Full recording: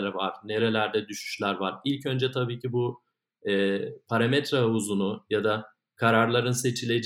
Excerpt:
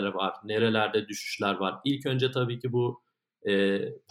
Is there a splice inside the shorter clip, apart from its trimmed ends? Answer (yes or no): no